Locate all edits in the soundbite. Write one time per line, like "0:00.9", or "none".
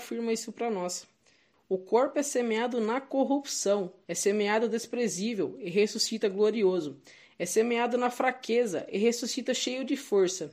0:01.5
0:04.0